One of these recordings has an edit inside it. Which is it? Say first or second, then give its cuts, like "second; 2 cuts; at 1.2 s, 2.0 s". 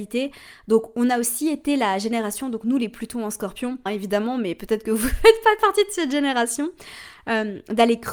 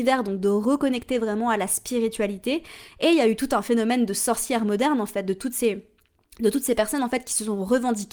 first; 1 cut; at 3.9 s